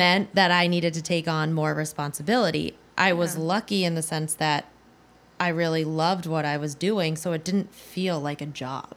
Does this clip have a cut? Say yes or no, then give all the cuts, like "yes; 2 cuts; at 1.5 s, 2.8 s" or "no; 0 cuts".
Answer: no; 0 cuts